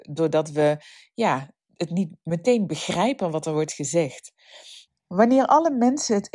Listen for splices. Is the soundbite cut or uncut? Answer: cut